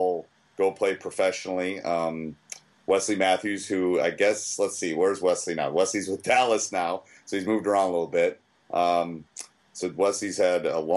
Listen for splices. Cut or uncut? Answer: uncut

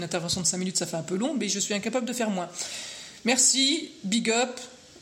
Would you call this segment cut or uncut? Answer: uncut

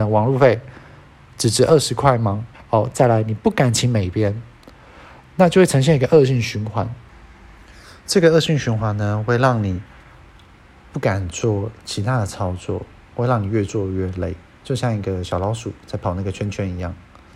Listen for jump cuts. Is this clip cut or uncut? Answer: cut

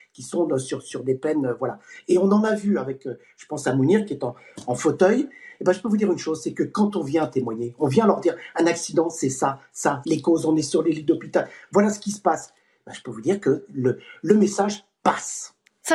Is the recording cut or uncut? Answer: cut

